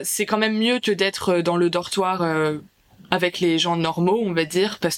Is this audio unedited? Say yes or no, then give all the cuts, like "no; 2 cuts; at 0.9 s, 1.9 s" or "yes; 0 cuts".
yes; 0 cuts